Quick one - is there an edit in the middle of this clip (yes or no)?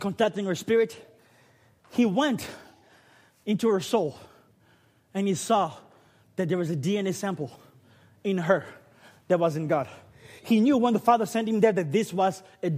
no